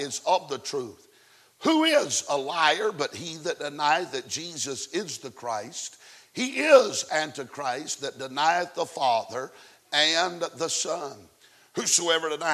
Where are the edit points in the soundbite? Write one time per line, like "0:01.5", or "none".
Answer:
none